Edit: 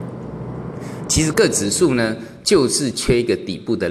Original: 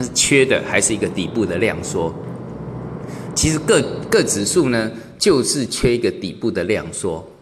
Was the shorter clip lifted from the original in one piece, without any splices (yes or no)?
no